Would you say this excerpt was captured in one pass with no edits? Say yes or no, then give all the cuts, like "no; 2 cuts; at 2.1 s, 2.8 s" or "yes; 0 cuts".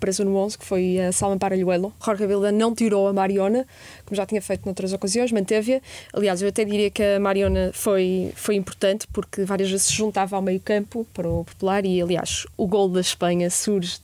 yes; 0 cuts